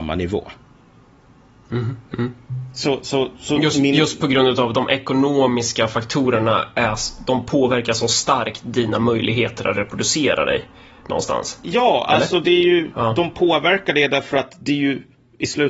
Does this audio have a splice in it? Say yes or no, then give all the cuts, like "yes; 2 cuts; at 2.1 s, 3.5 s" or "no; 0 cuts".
no; 0 cuts